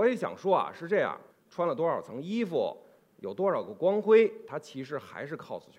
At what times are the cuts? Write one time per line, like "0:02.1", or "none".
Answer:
0:01.3